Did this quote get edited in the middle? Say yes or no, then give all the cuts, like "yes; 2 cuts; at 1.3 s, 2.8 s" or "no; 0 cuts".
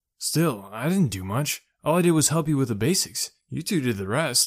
no; 0 cuts